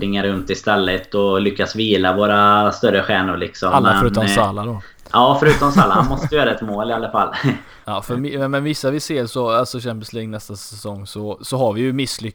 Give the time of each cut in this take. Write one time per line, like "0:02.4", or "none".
0:07.8

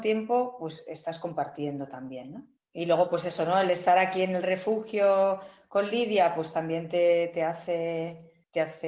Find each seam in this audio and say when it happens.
0:02.6

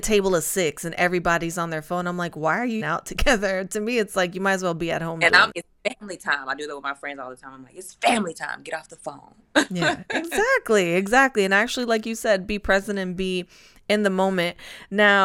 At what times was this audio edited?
0:02.8
0:05.5

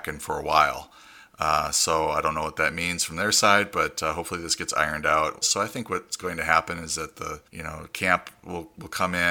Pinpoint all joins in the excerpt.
0:05.4
0:07.5

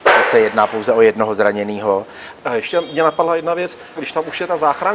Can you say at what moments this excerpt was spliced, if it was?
0:02.4
0:03.9

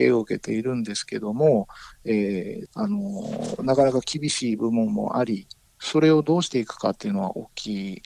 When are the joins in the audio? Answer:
0:02.6

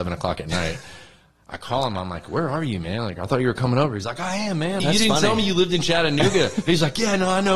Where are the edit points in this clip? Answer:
0:04.8

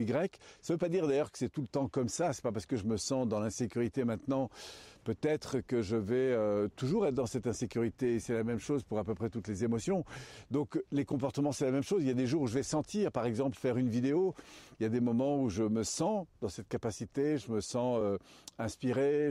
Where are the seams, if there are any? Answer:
none

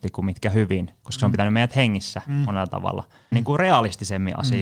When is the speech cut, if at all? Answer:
0:03.3

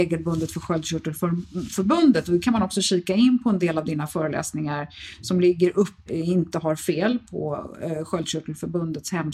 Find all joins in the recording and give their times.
0:06.1

